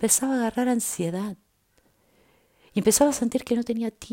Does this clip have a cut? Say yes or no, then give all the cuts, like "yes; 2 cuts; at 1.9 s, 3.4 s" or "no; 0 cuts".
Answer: no; 0 cuts